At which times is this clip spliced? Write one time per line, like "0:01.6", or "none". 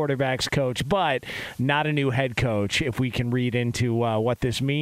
none